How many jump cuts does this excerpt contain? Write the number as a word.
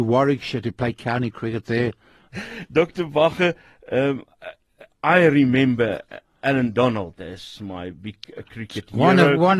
one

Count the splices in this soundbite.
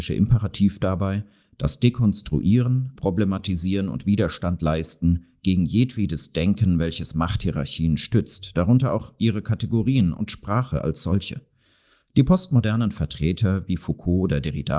one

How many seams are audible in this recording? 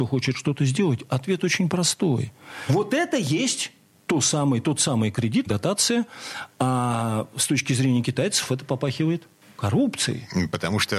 two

